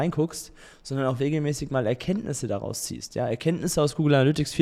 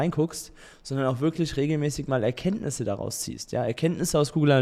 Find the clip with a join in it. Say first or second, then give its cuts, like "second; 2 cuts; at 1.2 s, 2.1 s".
first; 1 cut; at 1.2 s